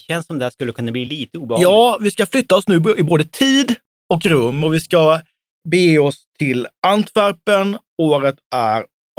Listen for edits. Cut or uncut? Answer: cut